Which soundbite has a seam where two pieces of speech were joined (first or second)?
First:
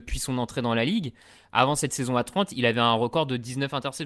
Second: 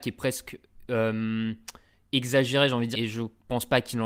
second